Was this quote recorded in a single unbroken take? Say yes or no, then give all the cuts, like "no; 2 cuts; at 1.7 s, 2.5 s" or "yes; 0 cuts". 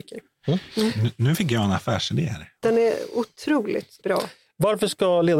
no; 2 cuts; at 2.6 s, 4.0 s